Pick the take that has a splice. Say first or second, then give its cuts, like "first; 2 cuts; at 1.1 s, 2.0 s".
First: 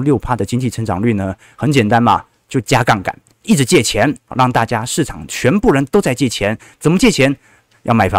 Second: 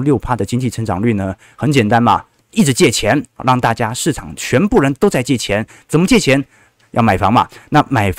second; 1 cut; at 2.4 s